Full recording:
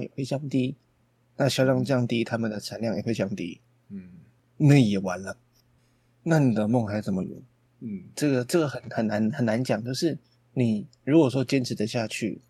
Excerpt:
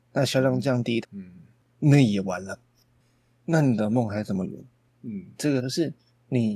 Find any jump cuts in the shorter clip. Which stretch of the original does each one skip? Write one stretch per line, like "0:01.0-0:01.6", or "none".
0:02.3-0:03.8
0:08.4-0:09.8